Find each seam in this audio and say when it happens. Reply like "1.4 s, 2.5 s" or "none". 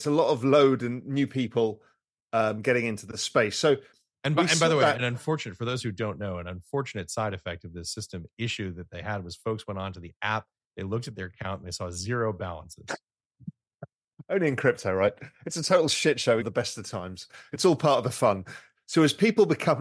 16.4 s, 18.8 s